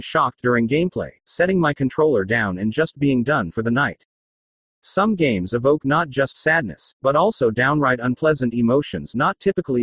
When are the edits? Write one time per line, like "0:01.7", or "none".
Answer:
0:04.6